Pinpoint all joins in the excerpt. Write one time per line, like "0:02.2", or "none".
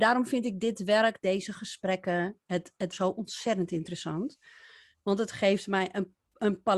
0:02.9